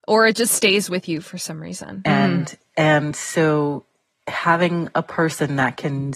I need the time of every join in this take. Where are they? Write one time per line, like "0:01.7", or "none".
0:02.0